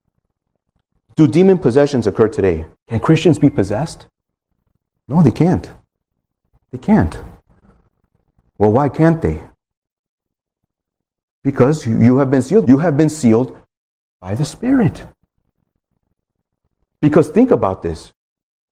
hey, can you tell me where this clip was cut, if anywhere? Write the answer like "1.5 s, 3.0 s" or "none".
5.0 s, 12.6 s